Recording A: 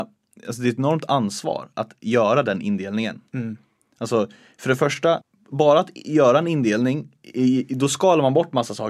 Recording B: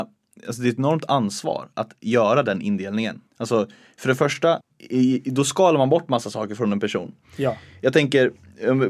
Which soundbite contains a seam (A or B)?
B